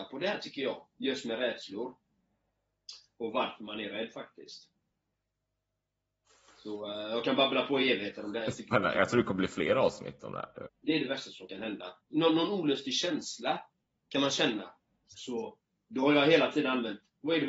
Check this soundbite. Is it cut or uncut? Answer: cut